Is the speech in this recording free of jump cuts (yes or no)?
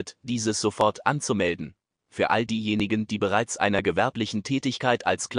yes